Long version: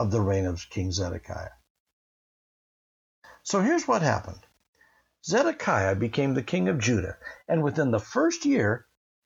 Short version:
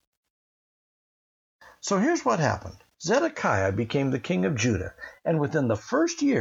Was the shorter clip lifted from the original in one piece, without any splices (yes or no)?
no